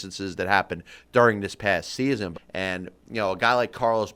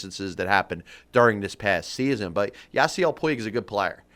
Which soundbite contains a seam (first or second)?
first